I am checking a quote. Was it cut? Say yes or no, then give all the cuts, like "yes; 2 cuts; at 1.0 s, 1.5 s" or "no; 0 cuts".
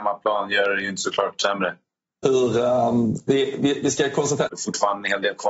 yes; 1 cut; at 4.5 s